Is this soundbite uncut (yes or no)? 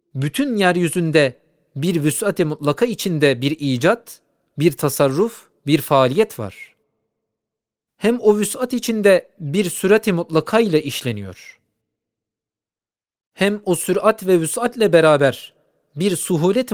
yes